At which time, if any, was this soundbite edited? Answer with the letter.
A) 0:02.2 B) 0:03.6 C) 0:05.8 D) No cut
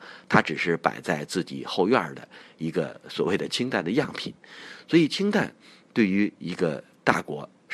D